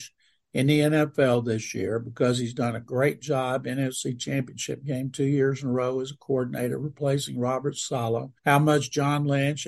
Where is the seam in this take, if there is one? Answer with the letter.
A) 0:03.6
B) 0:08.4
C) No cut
B